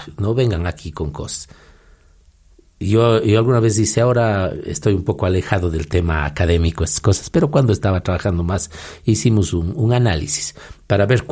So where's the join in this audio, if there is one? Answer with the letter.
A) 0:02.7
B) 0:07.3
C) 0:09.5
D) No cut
D